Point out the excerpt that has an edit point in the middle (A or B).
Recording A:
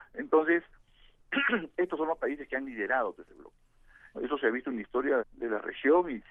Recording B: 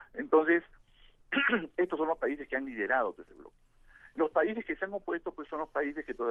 A